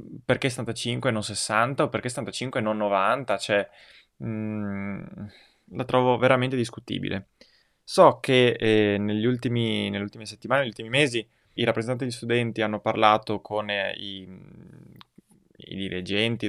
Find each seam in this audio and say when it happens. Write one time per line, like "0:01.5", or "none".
0:11.6

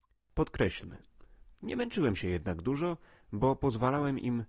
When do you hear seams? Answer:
0:01.5

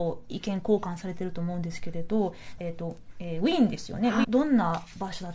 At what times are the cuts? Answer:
0:02.6
0:04.2

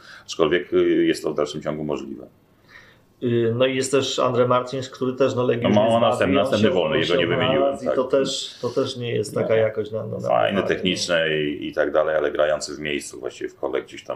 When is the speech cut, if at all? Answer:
none

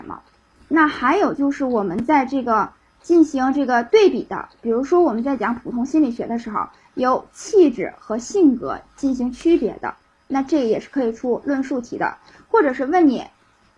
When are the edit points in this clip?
none

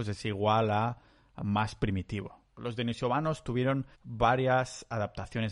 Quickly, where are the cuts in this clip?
0:02.6
0:03.9

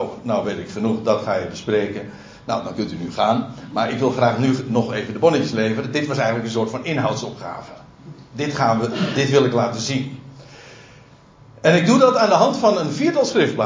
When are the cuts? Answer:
none

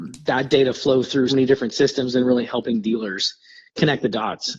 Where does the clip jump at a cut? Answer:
0:01.3

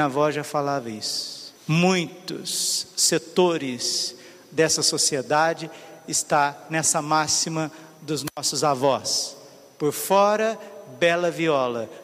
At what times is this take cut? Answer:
0:01.6

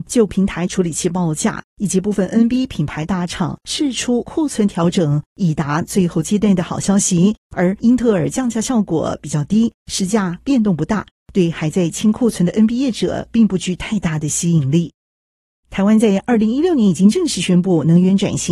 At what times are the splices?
0:07.5

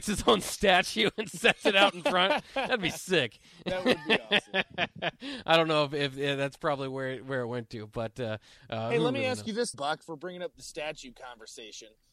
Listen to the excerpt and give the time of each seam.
0:09.7

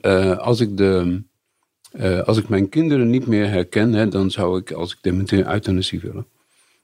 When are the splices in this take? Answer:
none

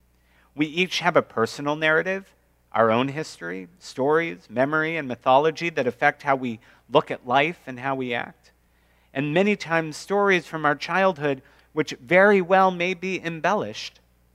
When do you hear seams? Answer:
none

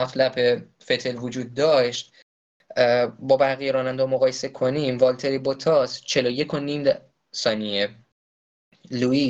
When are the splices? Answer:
none

